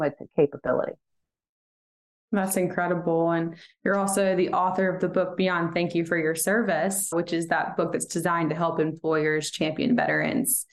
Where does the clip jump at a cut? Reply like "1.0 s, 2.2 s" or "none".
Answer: 7.1 s